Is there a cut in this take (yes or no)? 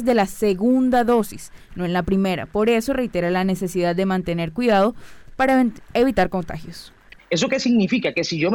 yes